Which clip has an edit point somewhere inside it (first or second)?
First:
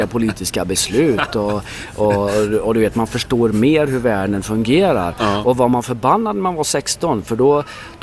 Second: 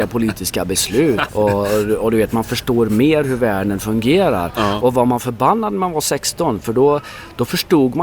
second